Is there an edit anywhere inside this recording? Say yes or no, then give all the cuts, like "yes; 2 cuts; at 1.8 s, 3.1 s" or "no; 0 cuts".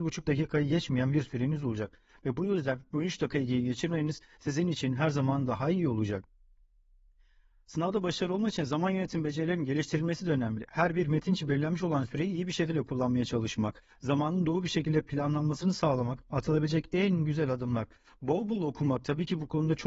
no; 0 cuts